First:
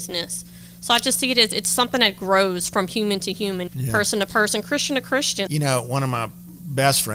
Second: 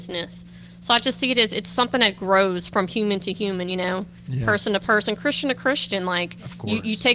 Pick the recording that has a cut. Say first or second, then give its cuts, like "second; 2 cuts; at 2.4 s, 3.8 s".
first; 2 cuts; at 3.7 s, 5.5 s